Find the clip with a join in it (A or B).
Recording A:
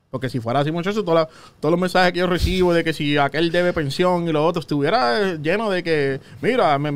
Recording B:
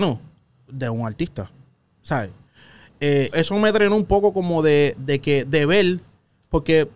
B